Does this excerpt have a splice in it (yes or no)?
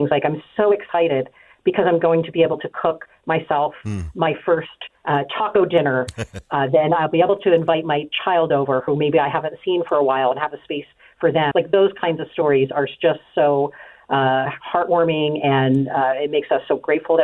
yes